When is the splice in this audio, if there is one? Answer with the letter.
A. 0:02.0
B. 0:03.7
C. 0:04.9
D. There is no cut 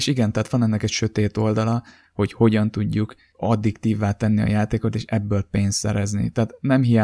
A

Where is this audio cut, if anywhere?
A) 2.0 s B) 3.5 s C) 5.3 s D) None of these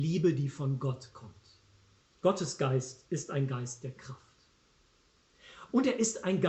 A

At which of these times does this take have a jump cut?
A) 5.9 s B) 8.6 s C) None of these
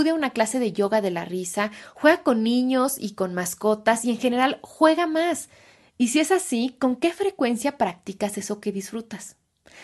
A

